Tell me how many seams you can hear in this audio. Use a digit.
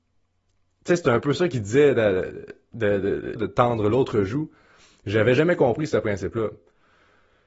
1